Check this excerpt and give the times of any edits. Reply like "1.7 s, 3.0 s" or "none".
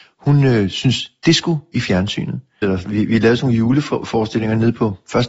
2.6 s

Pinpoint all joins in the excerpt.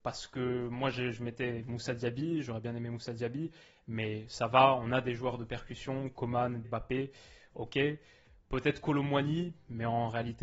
6.6 s

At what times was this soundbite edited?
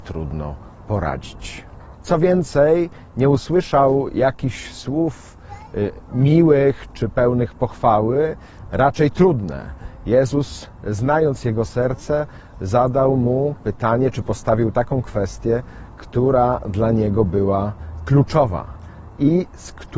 1.9 s

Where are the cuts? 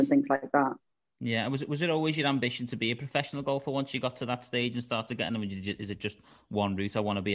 none

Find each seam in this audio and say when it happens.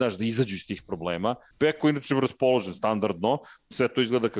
1.5 s

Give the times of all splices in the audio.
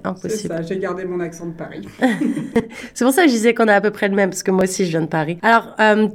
none

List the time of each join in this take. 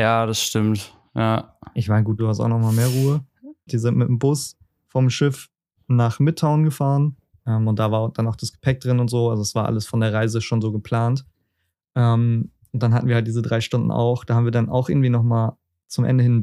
2.2 s, 3.7 s, 7.4 s

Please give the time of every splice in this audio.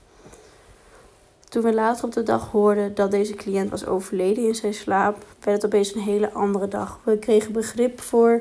5.3 s

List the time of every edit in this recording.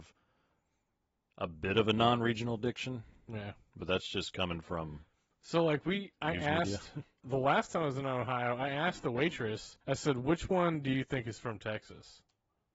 9.8 s

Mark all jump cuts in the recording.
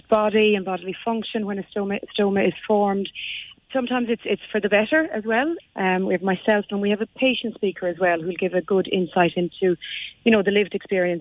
5.6 s

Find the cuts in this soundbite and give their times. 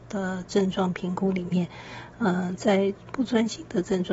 none

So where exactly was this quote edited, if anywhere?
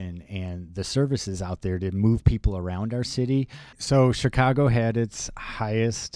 3.7 s

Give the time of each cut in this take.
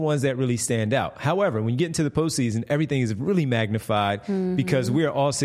none

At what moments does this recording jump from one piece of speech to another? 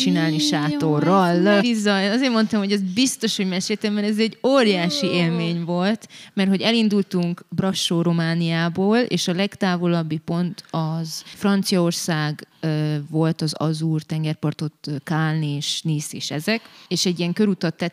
1.6 s

